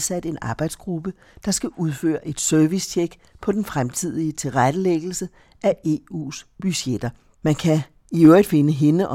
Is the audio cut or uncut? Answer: cut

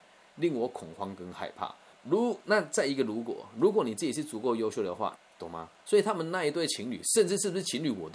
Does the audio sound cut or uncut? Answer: cut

